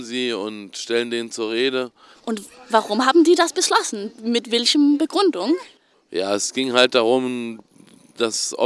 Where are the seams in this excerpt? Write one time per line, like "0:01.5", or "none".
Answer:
0:02.1